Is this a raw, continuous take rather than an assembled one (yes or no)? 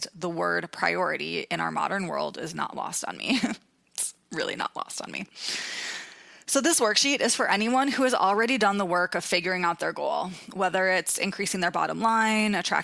yes